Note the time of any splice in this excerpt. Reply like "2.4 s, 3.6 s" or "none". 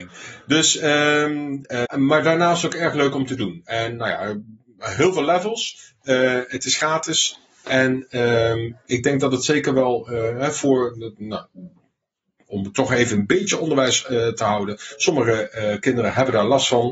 1.8 s